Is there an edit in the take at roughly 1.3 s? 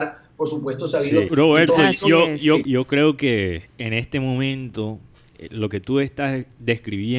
yes; 2 cuts; at 1.3 s, 2.6 s

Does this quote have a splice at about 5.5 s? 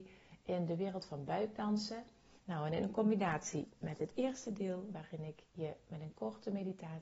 yes; 2 cuts; at 2.4 s, 5.5 s

